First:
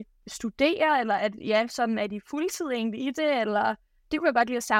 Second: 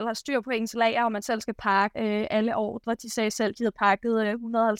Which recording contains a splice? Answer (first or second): second